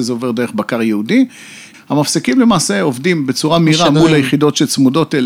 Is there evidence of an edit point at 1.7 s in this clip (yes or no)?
yes